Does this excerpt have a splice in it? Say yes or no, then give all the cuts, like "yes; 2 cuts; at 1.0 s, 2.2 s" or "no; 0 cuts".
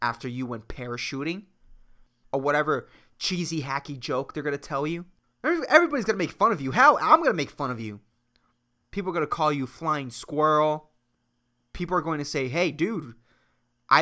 yes; 1 cut; at 5.2 s